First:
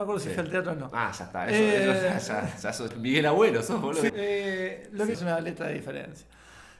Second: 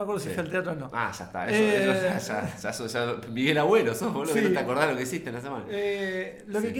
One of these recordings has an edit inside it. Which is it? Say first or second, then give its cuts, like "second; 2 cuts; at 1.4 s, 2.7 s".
first; 3 cuts; at 2.9 s, 4.1 s, 5.1 s